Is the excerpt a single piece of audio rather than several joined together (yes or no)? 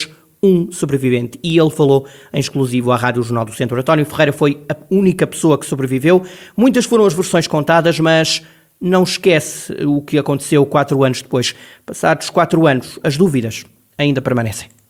yes